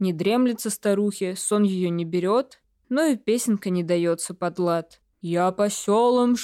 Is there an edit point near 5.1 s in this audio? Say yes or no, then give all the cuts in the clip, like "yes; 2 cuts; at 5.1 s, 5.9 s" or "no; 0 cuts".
yes; 2 cuts; at 2.8 s, 5.1 s